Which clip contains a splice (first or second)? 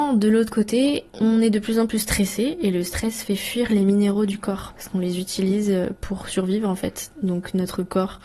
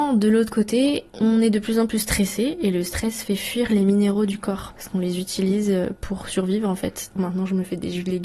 second